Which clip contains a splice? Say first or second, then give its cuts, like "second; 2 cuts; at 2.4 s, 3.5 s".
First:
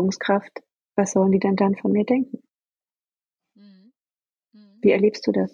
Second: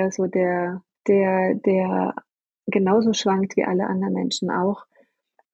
second; 1 cut; at 1.0 s